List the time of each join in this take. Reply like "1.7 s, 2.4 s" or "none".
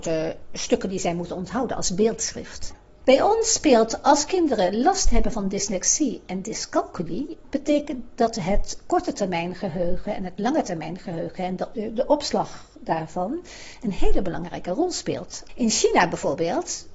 15.5 s

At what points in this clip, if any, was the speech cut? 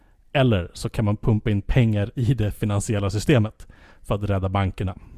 none

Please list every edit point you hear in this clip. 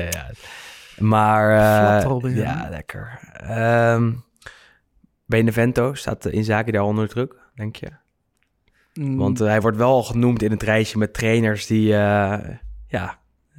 none

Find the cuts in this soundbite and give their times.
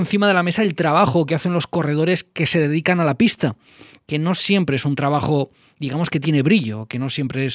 none

